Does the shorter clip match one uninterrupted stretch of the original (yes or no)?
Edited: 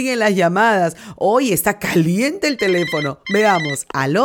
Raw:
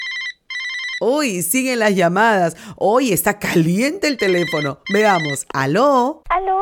yes